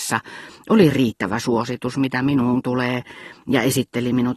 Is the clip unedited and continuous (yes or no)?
yes